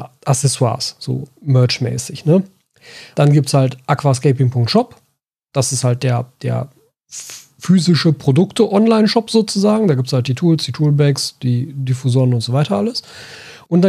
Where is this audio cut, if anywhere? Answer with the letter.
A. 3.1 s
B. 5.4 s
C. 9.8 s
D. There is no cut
A